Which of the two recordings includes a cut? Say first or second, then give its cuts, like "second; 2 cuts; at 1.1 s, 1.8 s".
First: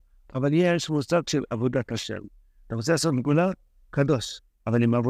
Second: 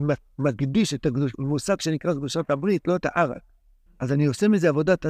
second; 1 cut; at 3.9 s